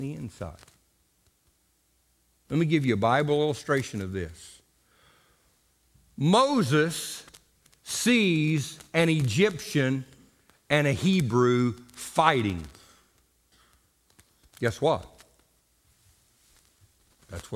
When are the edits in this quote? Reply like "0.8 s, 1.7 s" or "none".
none